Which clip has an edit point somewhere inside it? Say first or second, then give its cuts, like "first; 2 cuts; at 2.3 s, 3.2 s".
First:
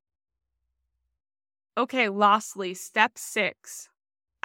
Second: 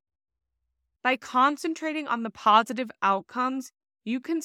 second; 1 cut; at 1.0 s